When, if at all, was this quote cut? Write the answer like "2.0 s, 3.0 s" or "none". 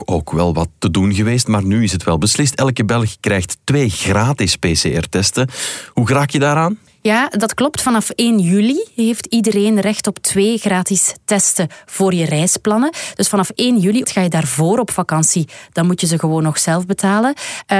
14.0 s